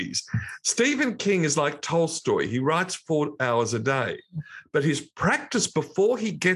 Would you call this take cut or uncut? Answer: uncut